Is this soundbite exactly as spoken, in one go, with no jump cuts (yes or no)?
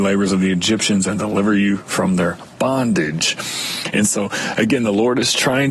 yes